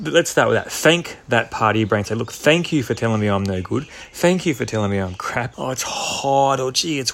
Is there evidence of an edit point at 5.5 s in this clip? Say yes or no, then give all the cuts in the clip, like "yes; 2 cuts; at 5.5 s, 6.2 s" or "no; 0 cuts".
yes; 1 cut; at 5.5 s